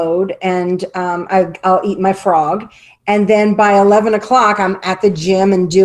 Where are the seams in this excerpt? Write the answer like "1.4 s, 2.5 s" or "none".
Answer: none